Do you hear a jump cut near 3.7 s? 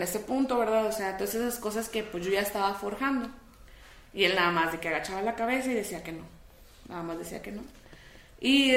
no; 0 cuts

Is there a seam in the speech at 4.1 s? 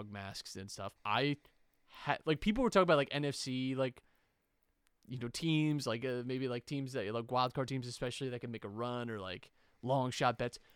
no; 1 cut; at 1.0 s

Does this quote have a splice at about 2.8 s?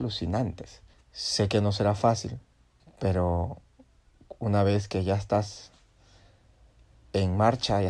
yes; 2 cuts; at 0.9 s, 2.8 s

